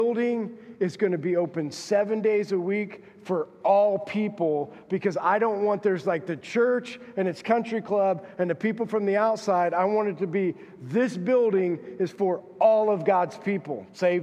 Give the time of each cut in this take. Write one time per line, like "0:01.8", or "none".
none

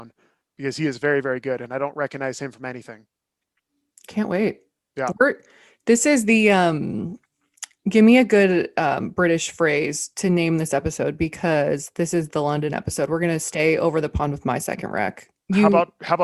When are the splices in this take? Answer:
none

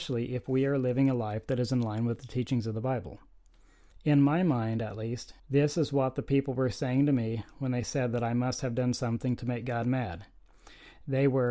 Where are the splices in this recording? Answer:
0:03.9
0:05.4

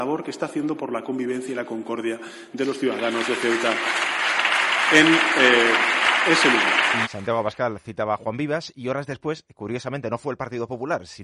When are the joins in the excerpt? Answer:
0:07.0

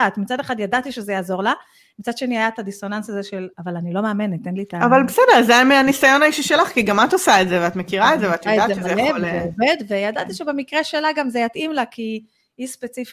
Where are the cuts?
none

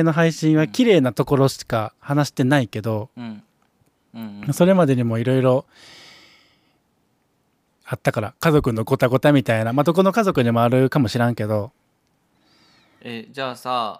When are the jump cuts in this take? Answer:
none

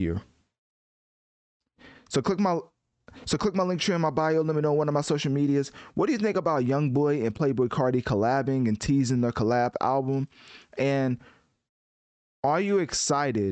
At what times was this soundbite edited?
none

